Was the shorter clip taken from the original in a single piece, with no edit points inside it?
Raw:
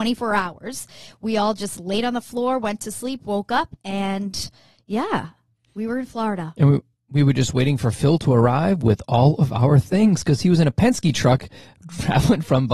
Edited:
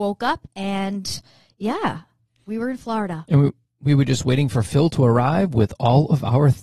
yes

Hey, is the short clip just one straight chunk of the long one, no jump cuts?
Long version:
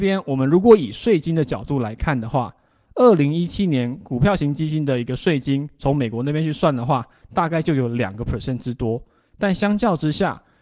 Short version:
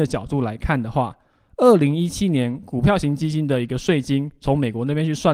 yes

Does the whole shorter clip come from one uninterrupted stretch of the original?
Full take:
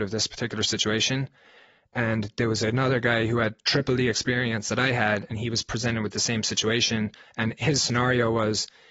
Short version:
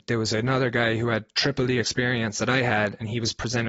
yes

